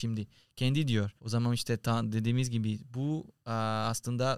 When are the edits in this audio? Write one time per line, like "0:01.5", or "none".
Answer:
0:01.2